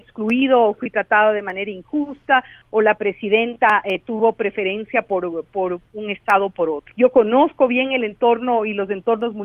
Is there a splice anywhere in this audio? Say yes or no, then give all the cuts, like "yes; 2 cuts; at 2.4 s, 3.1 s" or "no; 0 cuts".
yes; 1 cut; at 6.9 s